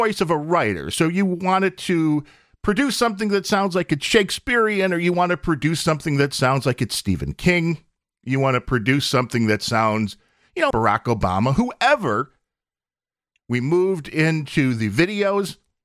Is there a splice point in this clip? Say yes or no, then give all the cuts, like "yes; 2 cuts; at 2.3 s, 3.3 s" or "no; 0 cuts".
yes; 2 cuts; at 10.7 s, 13.4 s